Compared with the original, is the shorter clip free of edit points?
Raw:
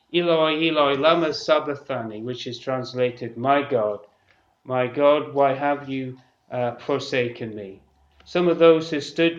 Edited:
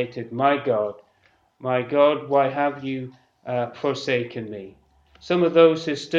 yes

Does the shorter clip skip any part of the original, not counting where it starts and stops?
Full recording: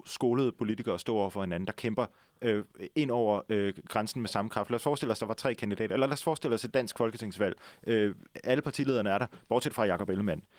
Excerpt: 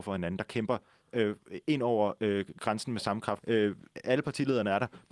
yes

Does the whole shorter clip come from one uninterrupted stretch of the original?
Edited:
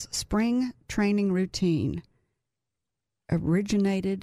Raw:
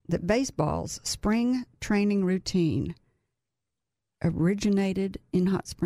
yes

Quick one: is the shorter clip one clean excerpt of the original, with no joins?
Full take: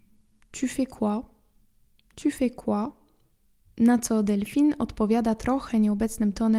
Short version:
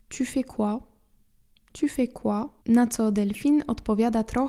no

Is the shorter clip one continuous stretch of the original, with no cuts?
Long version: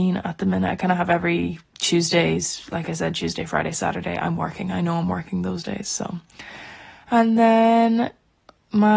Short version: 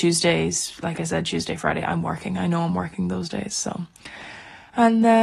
no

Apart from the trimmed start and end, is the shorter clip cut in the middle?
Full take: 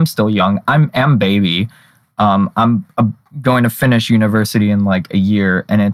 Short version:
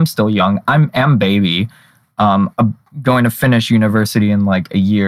yes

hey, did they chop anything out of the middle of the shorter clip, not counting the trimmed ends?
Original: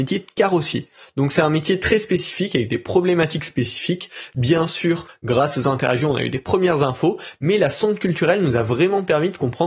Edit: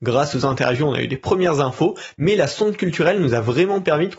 no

